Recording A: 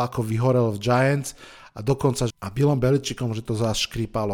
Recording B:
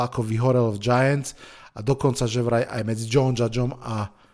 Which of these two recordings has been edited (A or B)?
A